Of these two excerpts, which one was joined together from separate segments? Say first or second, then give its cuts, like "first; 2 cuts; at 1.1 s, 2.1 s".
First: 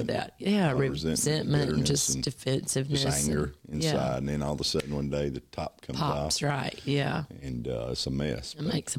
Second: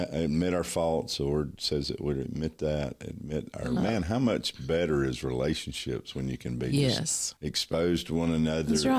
second; 2 cuts; at 3.8 s, 7.4 s